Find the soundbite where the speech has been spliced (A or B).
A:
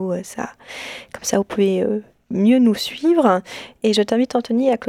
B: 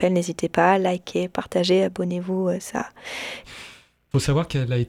B